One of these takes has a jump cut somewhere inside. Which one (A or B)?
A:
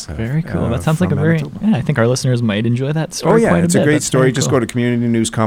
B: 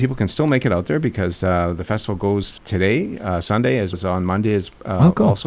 B